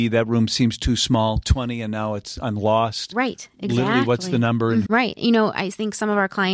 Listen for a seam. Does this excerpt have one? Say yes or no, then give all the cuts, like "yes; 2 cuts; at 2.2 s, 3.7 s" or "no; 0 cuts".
yes; 1 cut; at 4.9 s